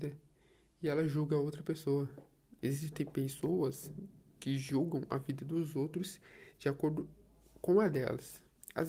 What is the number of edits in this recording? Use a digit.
1